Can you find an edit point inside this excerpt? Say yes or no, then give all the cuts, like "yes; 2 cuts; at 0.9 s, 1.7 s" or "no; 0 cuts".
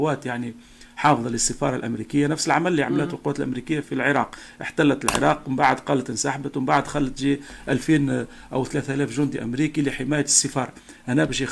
yes; 1 cut; at 3.8 s